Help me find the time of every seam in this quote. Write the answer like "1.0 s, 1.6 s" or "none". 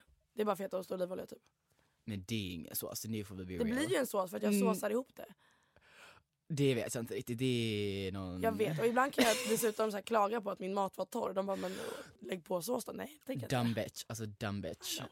12.2 s